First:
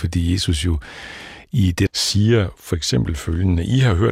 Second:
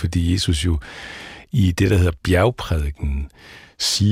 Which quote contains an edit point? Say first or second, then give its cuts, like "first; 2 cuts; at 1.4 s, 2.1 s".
first; 1 cut; at 1.9 s